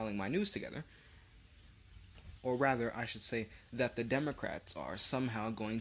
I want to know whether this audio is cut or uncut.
cut